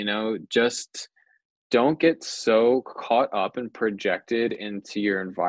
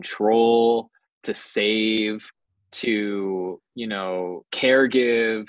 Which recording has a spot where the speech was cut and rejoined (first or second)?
second